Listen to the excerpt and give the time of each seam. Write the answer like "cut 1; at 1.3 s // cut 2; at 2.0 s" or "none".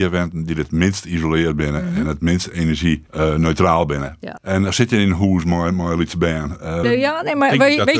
cut 1; at 3.1 s // cut 2; at 4.4 s // cut 3; at 6.8 s